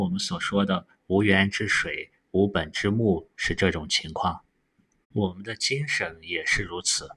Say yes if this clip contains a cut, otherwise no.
no